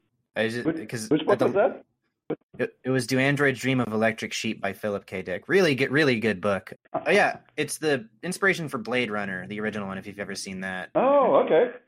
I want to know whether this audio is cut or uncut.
cut